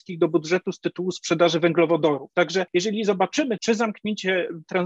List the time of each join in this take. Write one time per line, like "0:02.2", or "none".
0:02.3
0:03.6